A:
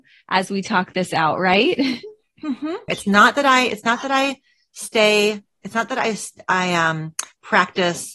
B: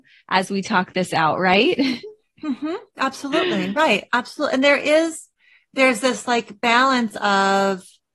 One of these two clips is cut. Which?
A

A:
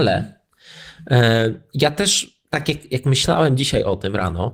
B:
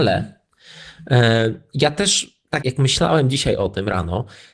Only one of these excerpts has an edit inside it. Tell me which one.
B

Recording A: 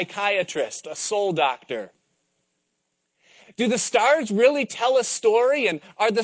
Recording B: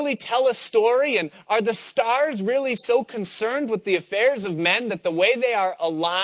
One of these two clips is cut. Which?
A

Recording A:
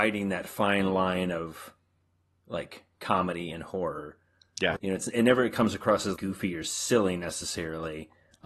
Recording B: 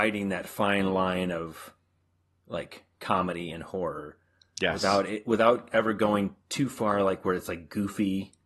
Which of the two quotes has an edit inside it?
A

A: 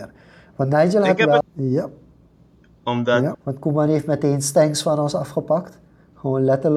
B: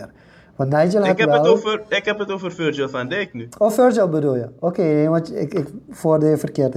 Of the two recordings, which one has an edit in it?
A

